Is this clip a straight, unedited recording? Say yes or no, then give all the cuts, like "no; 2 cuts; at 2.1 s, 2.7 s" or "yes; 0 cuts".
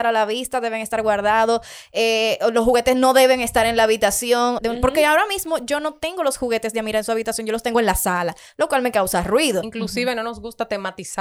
no; 2 cuts; at 4.6 s, 9.6 s